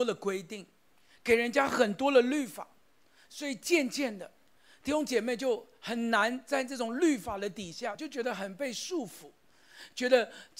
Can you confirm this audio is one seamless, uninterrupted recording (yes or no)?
yes